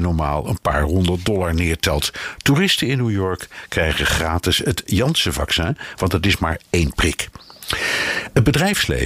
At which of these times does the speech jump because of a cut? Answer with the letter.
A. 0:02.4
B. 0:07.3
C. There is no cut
C